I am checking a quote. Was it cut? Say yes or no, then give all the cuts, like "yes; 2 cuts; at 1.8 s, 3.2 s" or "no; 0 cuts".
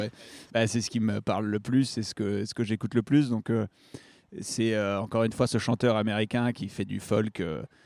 no; 0 cuts